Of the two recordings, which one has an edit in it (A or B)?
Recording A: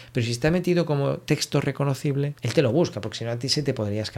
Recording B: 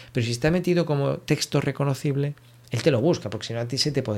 A